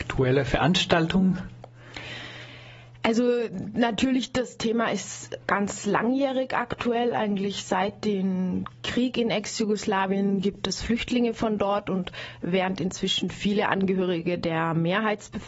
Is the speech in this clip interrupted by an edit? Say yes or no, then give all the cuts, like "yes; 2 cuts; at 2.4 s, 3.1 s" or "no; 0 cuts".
no; 0 cuts